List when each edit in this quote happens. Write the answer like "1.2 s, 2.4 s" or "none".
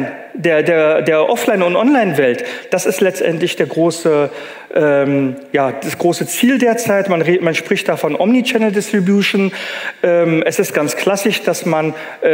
none